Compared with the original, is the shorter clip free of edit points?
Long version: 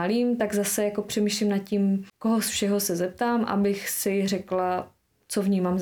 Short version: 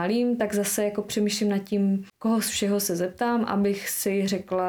yes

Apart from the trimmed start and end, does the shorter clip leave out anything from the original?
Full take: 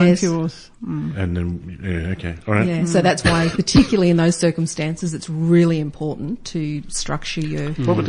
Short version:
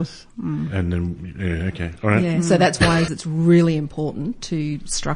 yes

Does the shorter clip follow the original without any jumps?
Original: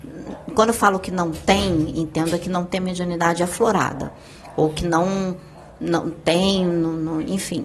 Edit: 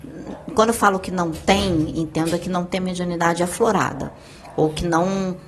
yes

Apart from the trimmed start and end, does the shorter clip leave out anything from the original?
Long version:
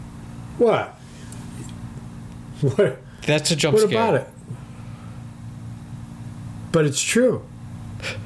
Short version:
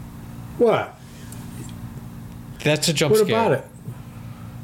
yes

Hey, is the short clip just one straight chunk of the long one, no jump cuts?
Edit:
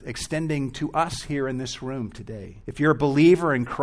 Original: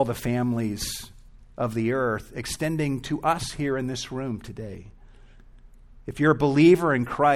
no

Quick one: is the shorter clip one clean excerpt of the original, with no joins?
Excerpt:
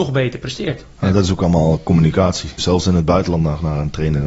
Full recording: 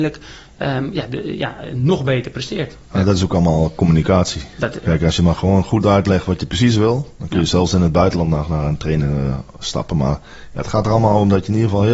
no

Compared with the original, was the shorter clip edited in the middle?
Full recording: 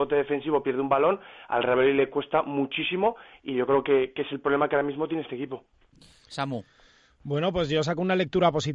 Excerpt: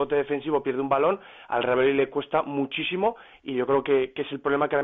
no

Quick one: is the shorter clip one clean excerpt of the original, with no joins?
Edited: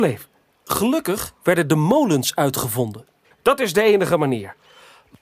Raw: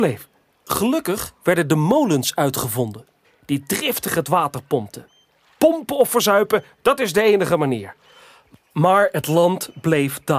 no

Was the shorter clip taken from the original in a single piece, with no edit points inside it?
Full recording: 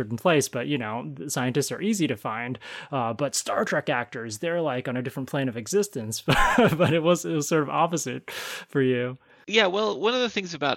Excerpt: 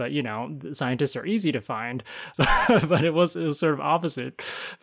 no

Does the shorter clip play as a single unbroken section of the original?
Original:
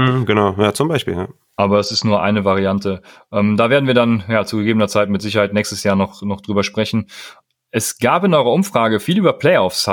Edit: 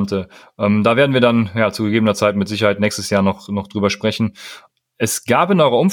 yes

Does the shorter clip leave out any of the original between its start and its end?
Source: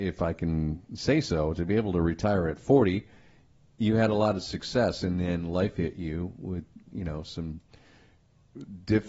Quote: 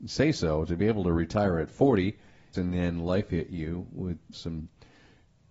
yes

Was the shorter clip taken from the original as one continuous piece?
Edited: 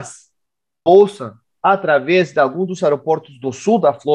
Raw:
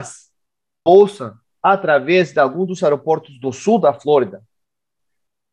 yes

